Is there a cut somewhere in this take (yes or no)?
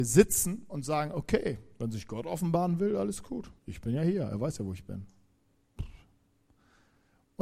yes